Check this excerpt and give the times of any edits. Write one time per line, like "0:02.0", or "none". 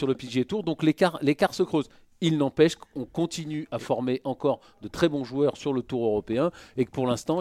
none